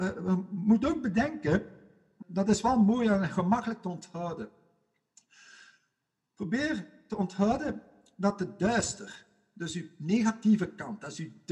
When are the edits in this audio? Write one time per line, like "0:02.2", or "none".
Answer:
0:02.2